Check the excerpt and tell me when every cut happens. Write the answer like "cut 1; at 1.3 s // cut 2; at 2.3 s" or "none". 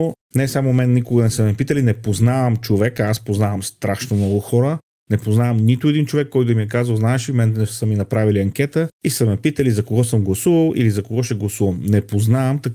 none